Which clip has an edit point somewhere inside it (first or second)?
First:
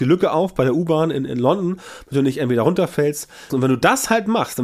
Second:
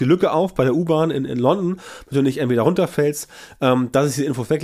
first